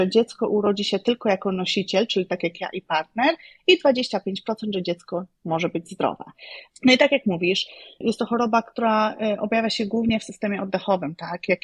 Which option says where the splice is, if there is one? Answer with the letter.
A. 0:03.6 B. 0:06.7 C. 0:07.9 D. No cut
B